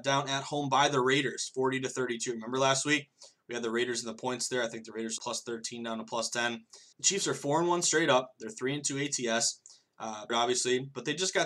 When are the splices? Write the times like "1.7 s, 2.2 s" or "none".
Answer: 5.2 s, 6.9 s, 10.3 s